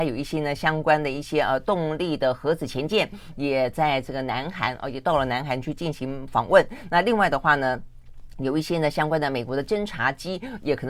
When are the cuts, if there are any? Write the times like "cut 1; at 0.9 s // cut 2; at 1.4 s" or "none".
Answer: none